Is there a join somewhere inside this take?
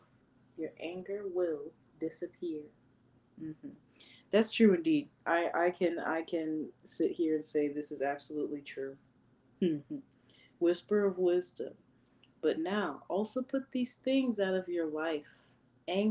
no; 0 cuts

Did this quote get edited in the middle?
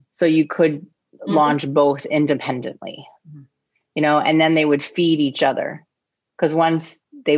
no; 0 cuts

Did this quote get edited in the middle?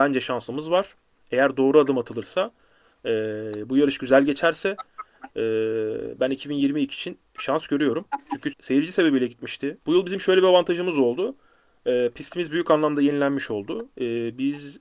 yes; 2 cuts; at 8.5 s, 9.8 s

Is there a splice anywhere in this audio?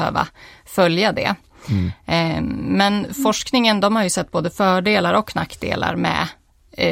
no; 0 cuts

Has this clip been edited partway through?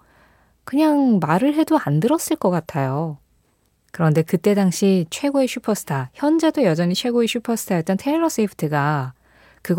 no; 0 cuts

